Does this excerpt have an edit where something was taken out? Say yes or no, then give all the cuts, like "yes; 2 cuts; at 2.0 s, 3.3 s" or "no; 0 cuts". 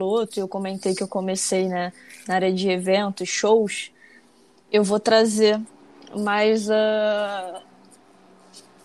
no; 0 cuts